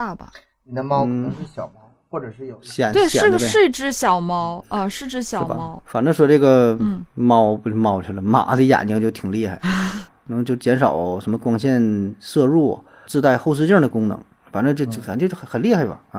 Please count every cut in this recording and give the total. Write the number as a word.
two